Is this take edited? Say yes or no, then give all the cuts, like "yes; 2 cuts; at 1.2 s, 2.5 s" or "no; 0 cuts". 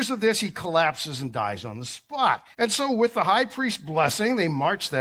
yes; 1 cut; at 2.5 s